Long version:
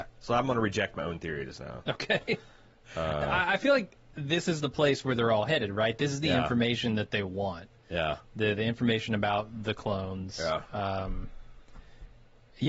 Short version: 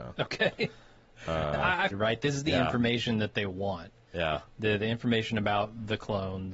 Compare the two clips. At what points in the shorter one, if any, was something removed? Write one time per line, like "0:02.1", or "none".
0:01.9